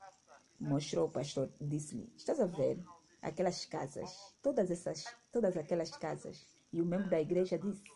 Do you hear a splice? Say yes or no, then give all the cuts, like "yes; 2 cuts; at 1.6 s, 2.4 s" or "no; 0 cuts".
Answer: yes; 2 cuts; at 4.3 s, 6.6 s